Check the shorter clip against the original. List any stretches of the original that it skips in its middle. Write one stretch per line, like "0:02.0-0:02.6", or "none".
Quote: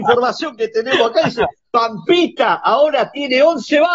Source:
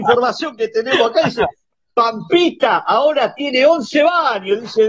0:01.6-0:01.8